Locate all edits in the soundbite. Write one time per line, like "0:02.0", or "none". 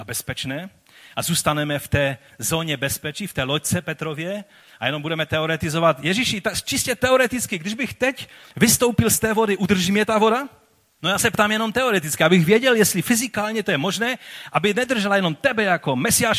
0:11.0